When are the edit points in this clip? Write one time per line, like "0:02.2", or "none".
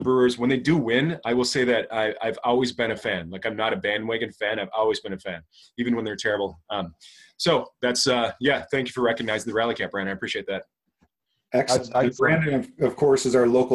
none